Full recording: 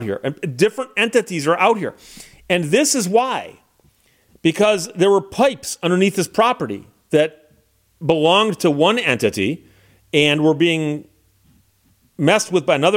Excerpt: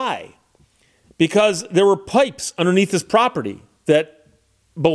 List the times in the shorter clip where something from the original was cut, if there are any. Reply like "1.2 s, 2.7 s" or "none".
none